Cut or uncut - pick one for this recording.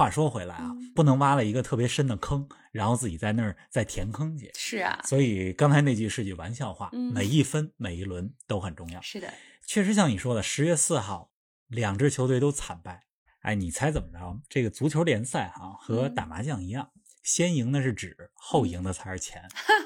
cut